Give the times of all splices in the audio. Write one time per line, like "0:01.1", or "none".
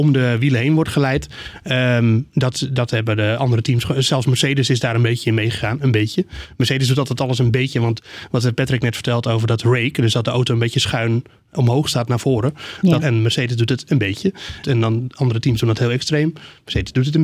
0:13.0
0:14.6

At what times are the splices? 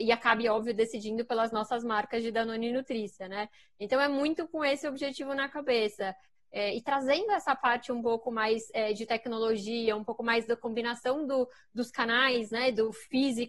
none

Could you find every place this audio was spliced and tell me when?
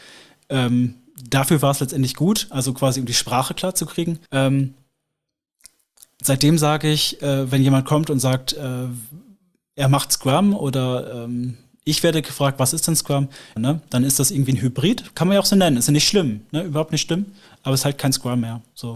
0:04.3
0:13.6

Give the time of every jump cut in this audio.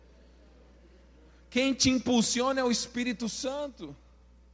none

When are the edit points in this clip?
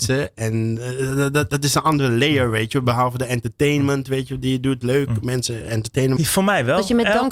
0:06.2

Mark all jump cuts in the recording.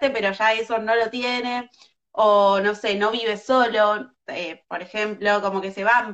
none

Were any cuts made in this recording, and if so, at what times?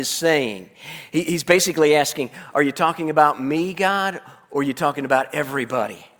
none

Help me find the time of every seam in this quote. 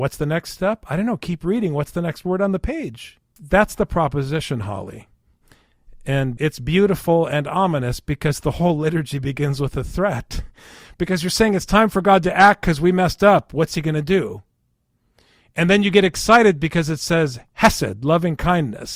none

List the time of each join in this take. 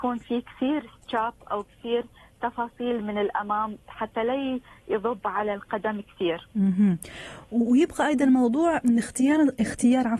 none

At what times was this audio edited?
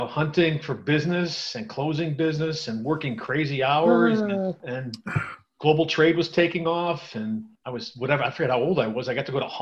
0:04.6
0:07.6

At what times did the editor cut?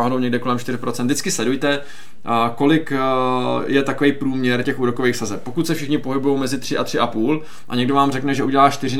0:04.6

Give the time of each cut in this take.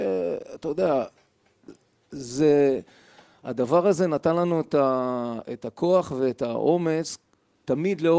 none

